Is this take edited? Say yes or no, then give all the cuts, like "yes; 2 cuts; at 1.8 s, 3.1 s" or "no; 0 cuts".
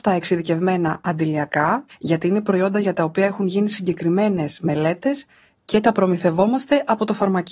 yes; 1 cut; at 1.9 s